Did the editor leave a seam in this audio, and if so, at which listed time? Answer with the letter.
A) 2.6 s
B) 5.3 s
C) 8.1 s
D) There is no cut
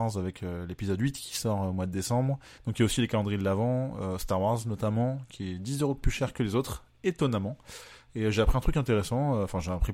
A